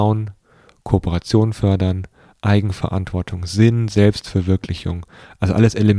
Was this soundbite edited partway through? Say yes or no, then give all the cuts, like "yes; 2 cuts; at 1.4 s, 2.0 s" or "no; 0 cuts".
no; 0 cuts